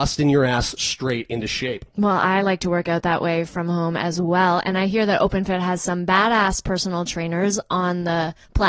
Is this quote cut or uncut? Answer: uncut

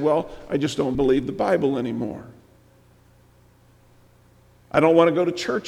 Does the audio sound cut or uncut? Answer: cut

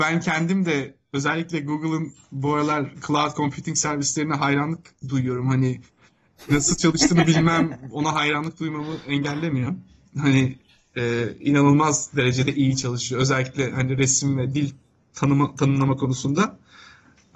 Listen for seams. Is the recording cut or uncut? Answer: uncut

